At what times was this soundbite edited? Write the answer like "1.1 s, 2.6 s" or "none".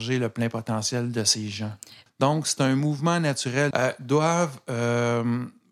2.1 s, 3.7 s